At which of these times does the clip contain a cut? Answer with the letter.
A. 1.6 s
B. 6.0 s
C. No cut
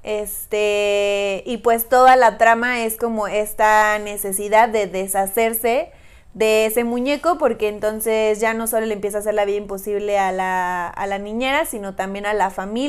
C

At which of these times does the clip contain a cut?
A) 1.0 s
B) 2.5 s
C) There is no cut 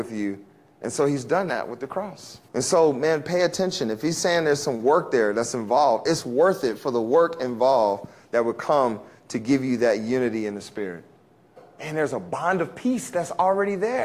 B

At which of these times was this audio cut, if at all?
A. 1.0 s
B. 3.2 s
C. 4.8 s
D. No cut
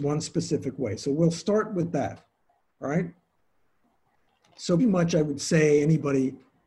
C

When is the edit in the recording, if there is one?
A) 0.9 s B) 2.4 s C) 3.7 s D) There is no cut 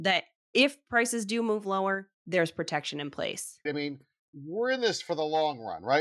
C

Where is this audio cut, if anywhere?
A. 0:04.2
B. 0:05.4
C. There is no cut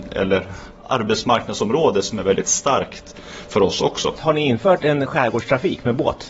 A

